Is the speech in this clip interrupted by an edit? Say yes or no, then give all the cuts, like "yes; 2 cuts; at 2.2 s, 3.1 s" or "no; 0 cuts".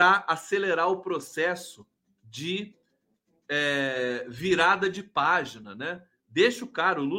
no; 0 cuts